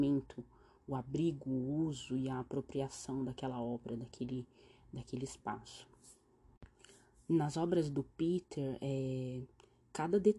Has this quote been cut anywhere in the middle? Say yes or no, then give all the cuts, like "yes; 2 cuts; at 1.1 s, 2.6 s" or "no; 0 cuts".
no; 0 cuts